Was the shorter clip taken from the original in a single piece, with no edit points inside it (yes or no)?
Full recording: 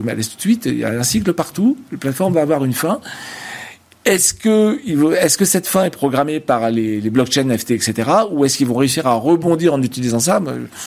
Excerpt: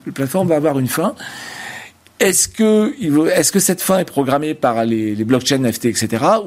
yes